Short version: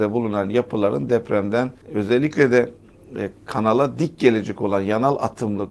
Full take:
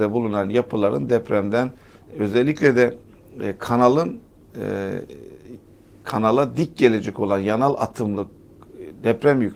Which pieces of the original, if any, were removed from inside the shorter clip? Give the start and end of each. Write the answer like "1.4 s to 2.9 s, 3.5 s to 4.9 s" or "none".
1.8 s to 2.1 s, 3.6 s to 5.9 s